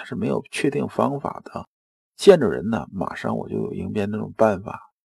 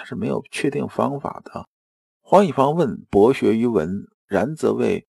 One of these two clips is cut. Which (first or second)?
second